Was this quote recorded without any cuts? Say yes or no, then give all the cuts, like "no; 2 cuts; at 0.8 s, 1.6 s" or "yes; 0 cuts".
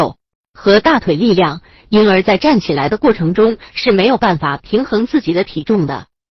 yes; 0 cuts